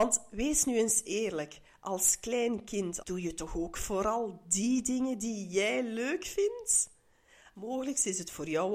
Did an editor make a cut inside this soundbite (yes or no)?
yes